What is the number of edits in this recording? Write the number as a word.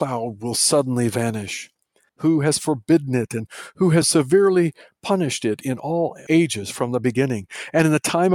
two